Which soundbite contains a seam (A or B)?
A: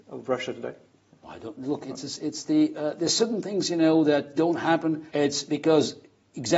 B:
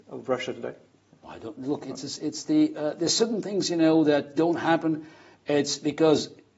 A